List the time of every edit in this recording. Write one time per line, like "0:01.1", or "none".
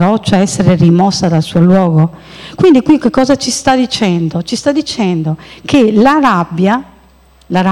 none